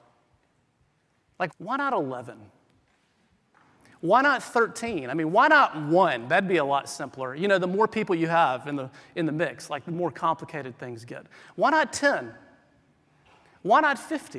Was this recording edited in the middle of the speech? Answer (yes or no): yes